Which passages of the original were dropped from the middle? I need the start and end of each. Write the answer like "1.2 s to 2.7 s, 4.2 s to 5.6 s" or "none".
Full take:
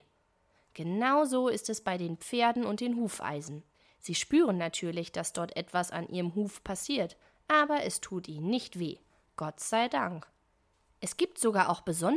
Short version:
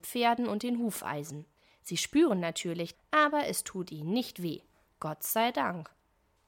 5.1 s to 7.3 s